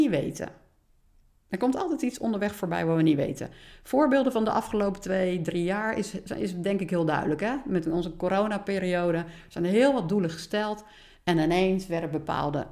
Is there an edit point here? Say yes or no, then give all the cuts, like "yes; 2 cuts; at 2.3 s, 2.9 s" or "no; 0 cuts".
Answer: no; 0 cuts